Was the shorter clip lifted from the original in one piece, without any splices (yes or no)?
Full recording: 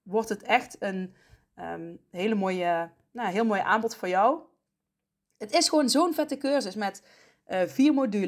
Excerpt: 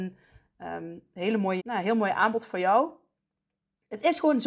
no